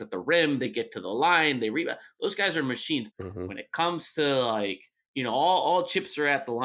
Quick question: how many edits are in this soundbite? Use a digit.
1